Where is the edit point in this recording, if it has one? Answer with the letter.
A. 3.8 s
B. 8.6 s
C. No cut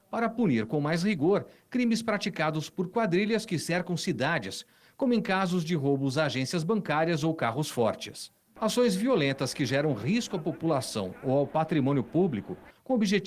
B